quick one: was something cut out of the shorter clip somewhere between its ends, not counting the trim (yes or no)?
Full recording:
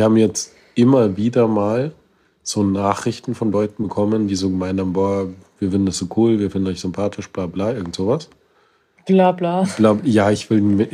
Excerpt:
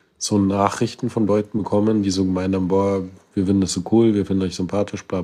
no